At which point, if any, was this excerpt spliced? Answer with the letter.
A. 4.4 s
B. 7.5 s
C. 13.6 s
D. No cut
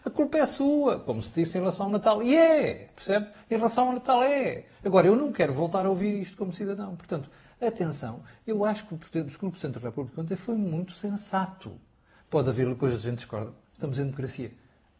C